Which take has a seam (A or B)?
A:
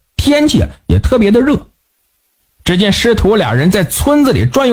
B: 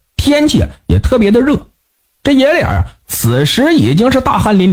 B